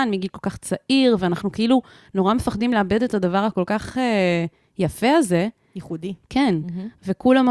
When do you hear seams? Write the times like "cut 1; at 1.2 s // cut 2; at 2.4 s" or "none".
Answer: cut 1; at 6.2 s